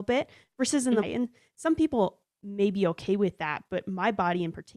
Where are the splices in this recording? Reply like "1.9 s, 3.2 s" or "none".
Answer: 1.0 s